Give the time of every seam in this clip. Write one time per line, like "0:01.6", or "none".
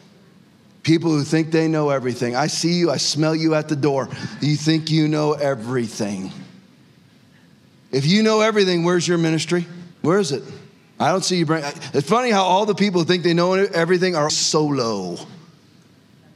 0:09.9
0:14.3

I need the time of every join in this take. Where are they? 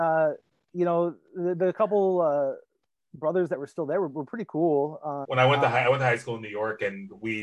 0:05.2

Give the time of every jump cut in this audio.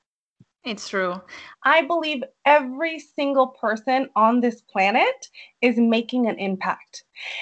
0:01.5

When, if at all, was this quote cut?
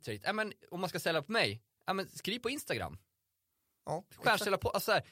none

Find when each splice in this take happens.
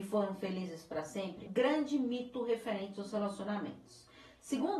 0:01.5

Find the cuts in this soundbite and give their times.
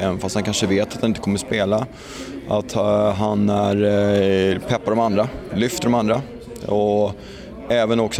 none

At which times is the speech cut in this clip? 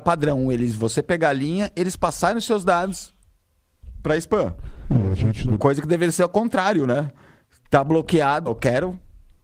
0:05.6
0:08.5

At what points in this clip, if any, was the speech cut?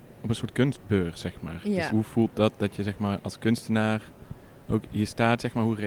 0:01.9

